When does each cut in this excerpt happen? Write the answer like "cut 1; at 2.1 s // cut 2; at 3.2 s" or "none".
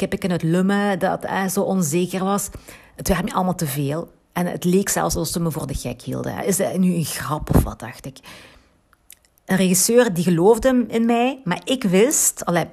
none